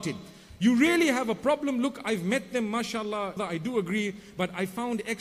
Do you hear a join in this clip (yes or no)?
yes